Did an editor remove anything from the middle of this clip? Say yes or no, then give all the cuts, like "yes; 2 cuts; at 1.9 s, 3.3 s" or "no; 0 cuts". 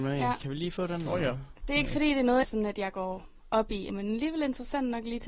yes; 2 cuts; at 2.4 s, 3.9 s